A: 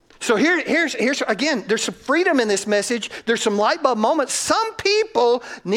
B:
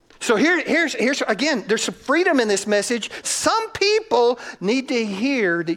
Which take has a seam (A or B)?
B